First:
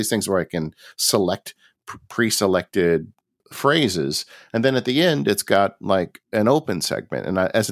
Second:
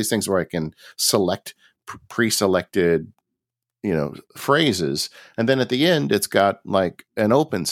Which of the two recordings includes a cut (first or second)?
first